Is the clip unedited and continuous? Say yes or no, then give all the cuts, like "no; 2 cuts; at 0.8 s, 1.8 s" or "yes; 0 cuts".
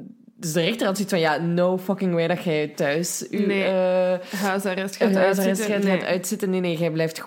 yes; 0 cuts